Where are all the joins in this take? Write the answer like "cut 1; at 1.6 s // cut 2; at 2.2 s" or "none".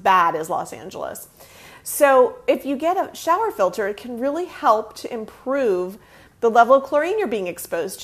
none